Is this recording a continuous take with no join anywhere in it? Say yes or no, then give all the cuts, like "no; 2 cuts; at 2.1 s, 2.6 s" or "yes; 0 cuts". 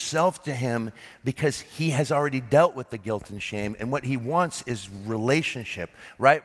yes; 0 cuts